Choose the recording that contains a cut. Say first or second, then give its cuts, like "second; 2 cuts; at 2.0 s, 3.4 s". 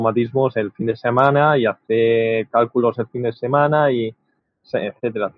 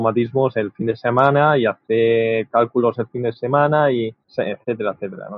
second; 1 cut; at 4.2 s